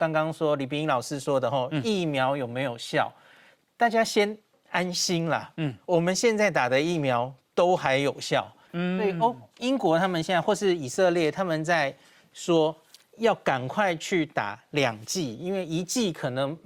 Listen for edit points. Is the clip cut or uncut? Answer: cut